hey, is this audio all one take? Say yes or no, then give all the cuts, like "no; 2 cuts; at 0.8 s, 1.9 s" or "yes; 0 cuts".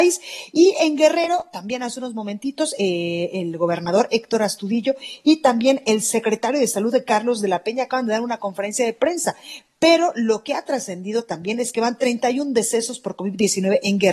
yes; 0 cuts